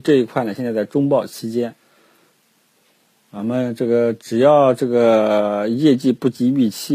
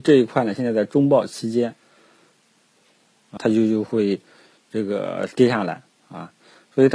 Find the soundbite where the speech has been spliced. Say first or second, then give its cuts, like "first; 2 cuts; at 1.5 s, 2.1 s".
second; 1 cut; at 3.4 s